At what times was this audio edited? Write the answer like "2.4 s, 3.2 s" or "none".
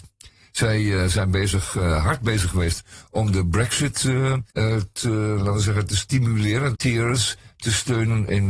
4.5 s, 6.7 s